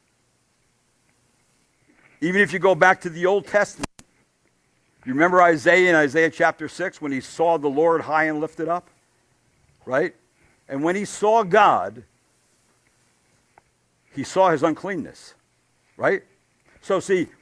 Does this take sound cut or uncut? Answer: uncut